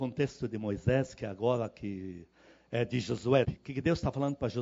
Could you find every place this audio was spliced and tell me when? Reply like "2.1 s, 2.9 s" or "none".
3.4 s